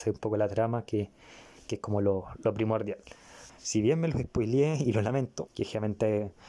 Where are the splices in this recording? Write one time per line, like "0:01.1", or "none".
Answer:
0:03.5
0:05.5